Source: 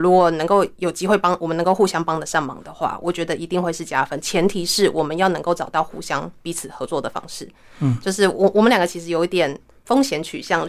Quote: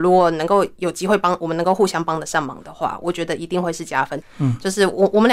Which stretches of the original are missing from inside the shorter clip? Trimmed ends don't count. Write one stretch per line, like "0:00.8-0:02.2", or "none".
0:04.2-0:07.6